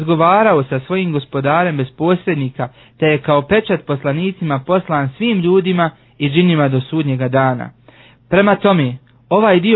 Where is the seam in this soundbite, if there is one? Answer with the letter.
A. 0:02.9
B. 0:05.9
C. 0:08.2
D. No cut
A